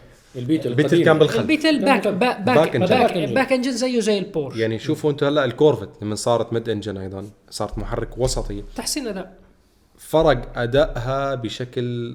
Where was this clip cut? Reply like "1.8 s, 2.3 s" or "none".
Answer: none